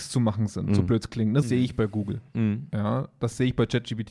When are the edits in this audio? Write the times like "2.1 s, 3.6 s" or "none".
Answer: 1.4 s